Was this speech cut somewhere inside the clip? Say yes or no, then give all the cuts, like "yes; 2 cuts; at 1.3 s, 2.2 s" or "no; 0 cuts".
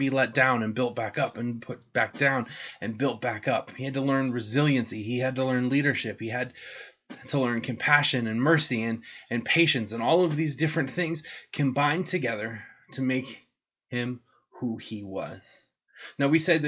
no; 0 cuts